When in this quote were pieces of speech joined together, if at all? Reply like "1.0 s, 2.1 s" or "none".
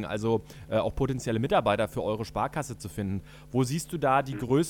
none